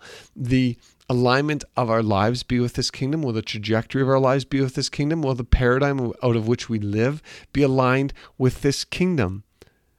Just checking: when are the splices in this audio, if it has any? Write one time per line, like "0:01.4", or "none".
none